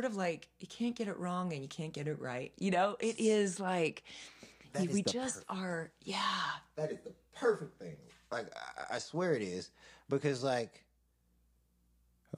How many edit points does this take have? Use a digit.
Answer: 0